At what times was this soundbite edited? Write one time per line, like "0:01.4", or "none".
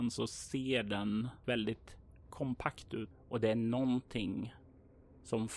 0:01.4
0:03.1